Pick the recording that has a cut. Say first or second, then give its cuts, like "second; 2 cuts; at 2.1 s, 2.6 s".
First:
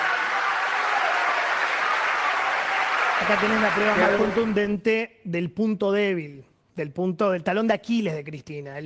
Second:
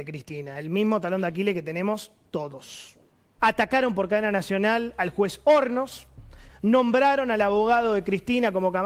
second; 2 cuts; at 3.4 s, 6.5 s